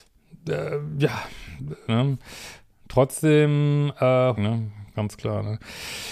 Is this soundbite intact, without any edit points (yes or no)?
no